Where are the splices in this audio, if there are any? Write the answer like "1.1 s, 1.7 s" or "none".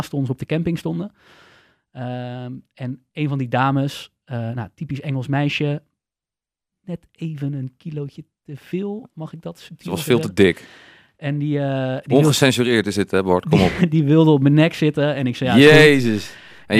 none